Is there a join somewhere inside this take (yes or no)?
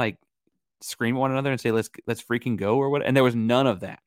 no